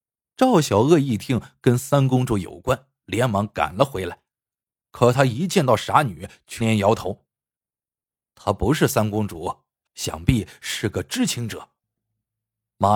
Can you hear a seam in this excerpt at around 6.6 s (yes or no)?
yes